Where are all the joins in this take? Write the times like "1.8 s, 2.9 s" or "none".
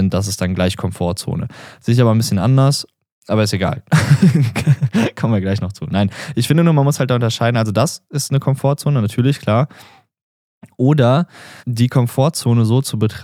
11.6 s